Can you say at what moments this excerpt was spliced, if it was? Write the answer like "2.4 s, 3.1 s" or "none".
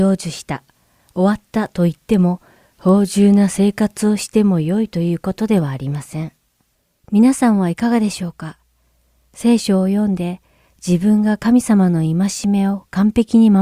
2.7 s, 7.0 s